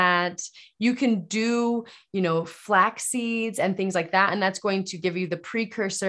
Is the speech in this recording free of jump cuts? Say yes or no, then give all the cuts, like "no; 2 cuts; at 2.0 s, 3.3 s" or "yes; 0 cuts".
yes; 0 cuts